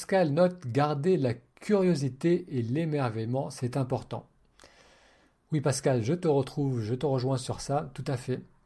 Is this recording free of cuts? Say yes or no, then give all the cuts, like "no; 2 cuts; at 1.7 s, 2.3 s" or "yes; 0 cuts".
yes; 0 cuts